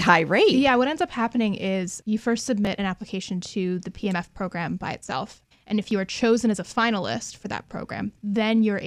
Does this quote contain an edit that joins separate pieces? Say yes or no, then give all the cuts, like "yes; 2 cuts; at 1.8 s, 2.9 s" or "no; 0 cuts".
yes; 2 cuts; at 2.0 s, 5.5 s